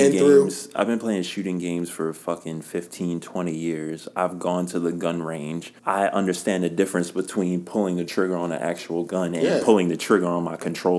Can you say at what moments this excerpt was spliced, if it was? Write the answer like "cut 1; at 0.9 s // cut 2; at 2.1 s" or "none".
cut 1; at 5.8 s

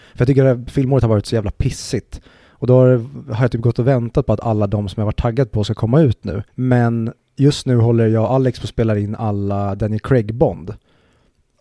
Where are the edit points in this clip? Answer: cut 1; at 6.5 s

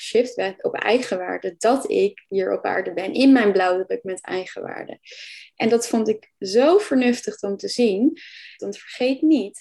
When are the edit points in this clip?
cut 1; at 8.6 s

